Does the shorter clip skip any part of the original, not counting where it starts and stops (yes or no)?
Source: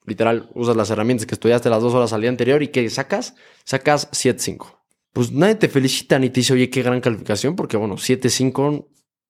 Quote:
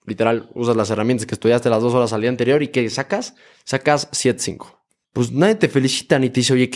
no